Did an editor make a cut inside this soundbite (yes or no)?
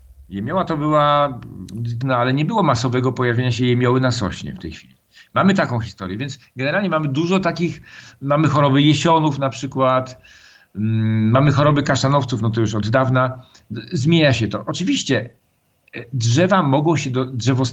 yes